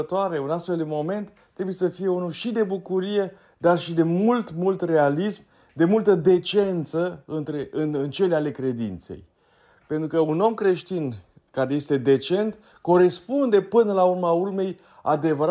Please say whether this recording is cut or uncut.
uncut